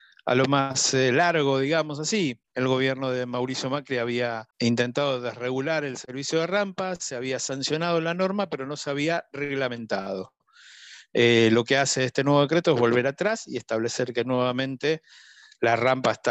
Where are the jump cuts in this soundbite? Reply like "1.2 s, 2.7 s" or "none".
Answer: 2.4 s, 4.5 s